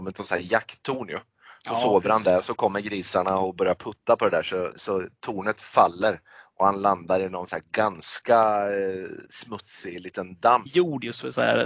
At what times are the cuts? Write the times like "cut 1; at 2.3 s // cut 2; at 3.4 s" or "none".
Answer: cut 1; at 4.7 s // cut 2; at 9.3 s // cut 3; at 10.7 s